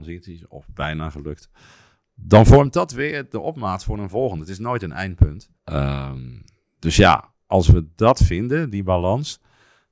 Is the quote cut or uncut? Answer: cut